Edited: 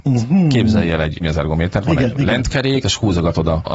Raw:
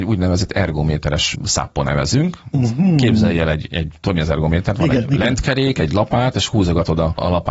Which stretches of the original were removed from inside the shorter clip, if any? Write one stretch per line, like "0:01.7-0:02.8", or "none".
0:03.7-0:04.1
0:05.7-0:06.3